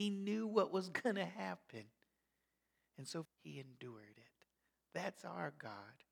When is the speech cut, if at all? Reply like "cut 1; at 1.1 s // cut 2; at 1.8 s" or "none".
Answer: cut 1; at 3.3 s